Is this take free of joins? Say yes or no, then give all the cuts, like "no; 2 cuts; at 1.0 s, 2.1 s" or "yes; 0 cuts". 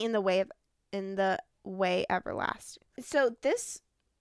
yes; 0 cuts